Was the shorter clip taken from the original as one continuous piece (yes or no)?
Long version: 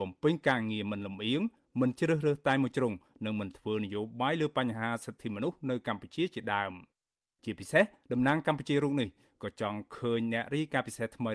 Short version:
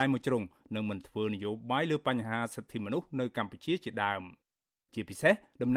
yes